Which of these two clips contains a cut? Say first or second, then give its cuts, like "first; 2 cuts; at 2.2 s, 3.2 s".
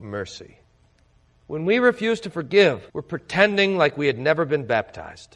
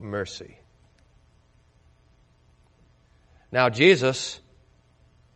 first; 2 cuts; at 1.3 s, 2.9 s